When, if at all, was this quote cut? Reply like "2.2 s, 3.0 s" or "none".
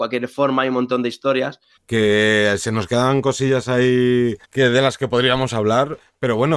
1.8 s, 4.4 s